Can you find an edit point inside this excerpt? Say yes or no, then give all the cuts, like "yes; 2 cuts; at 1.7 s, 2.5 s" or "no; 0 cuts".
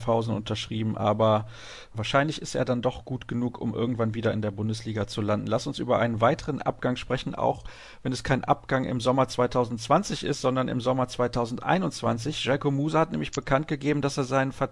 no; 0 cuts